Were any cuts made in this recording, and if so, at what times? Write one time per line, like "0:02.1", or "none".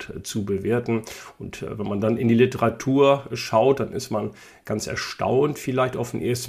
none